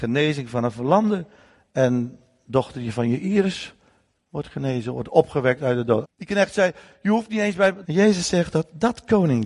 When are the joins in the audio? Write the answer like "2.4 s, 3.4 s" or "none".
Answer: 6.0 s, 7.8 s